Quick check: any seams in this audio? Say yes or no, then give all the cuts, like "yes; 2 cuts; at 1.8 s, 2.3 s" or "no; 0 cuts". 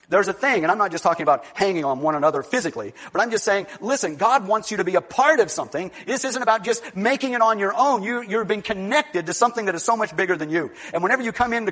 no; 0 cuts